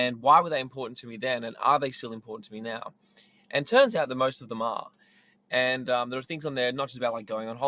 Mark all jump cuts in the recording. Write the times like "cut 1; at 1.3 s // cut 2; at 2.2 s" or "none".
none